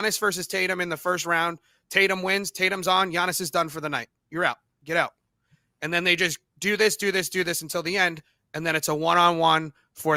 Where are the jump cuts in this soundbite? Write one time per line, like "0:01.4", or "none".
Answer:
none